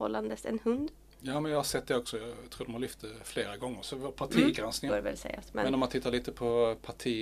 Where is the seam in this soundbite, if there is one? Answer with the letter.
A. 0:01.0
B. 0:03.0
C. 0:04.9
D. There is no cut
C